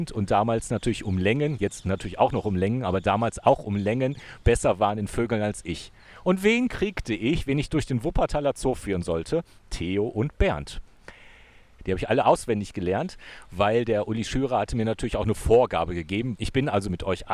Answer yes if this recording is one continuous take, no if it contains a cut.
no